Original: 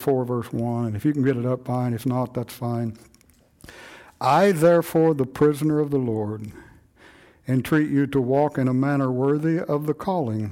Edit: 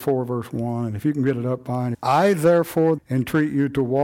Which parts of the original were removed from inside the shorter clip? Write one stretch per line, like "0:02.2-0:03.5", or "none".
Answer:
0:01.9-0:04.1
0:05.2-0:07.4